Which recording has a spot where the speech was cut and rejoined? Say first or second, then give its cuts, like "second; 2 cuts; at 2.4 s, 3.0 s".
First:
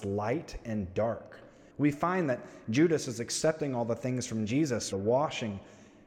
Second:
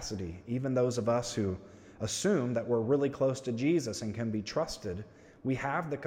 first; 2 cuts; at 1.7 s, 4.9 s